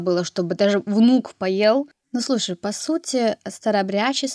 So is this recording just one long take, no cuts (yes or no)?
no